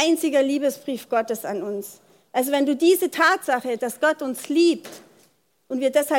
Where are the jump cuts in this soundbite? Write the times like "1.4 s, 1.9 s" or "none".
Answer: none